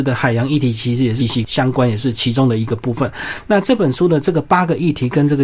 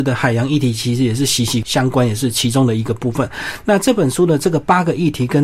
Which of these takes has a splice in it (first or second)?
first